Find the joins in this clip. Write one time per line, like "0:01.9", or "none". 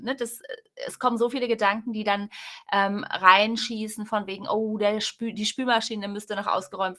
none

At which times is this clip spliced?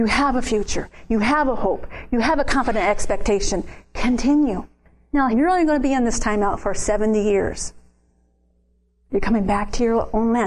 0:05.3
0:09.1

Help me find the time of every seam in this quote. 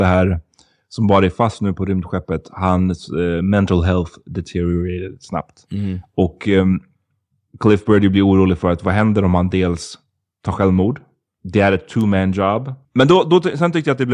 0:11.3
0:12.8

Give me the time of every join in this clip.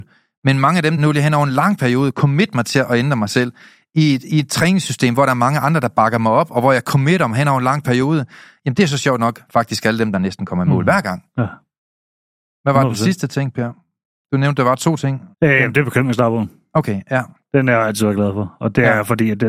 0:01.0
0:15.3

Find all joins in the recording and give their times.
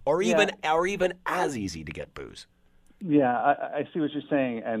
none

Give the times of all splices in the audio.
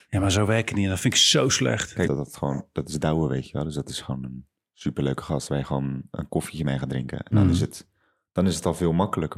0:02.0

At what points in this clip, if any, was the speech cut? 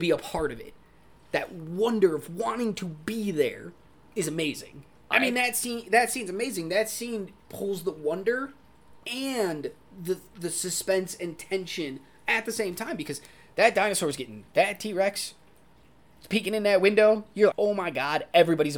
0:05.1
0:17.5

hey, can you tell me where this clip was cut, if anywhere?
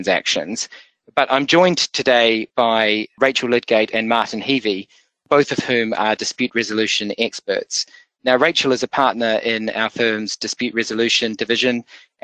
none

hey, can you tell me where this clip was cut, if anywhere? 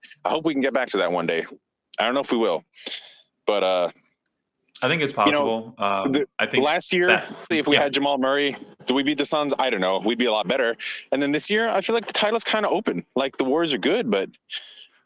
0:07.5

